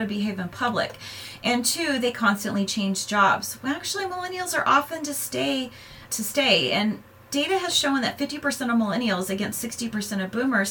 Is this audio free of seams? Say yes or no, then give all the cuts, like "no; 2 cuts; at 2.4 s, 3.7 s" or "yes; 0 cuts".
no; 1 cut; at 6.1 s